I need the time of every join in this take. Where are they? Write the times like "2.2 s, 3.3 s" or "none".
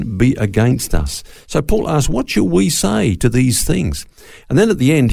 none